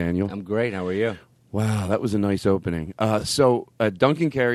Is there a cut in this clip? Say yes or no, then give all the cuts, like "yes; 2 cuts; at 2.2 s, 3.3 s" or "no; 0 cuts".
no; 0 cuts